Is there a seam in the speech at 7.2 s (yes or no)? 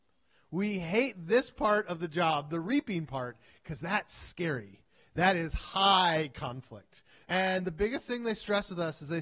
yes